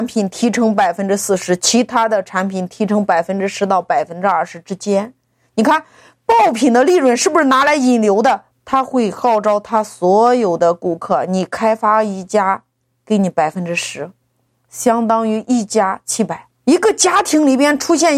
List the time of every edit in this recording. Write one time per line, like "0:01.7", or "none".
0:08.5
0:16.6